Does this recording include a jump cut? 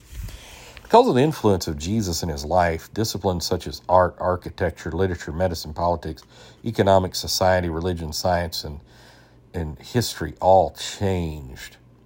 no; 0 cuts

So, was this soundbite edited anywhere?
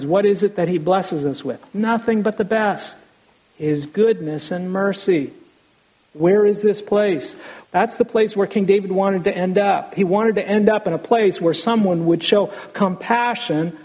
yes; 1 cut; at 7.6 s

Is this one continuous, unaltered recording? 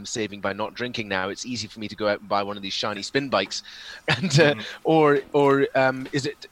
no; 1 cut; at 4.0 s

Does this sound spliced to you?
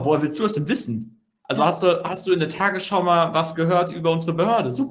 no; 0 cuts

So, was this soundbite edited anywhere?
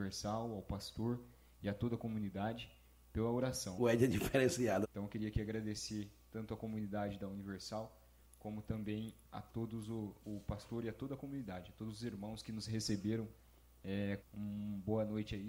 yes; 3 cuts; at 3.8 s, 4.8 s, 14.2 s

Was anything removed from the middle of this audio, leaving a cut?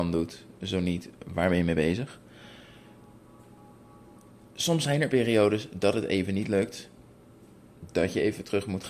no; 0 cuts

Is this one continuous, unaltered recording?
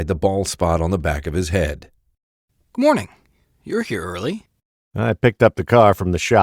yes; 0 cuts

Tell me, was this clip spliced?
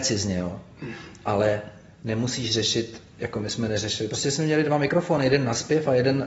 no; 0 cuts

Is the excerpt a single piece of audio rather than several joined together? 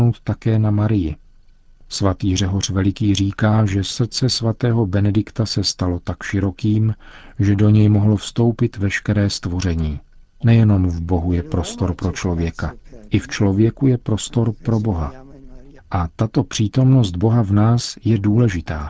no; 2 cuts; at 10.4 s, 15.8 s

